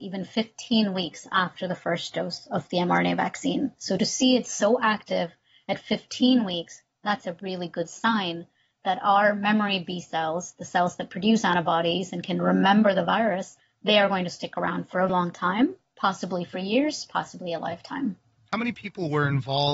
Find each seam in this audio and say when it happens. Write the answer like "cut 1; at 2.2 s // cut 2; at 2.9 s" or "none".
cut 1; at 3.8 s // cut 2; at 15.1 s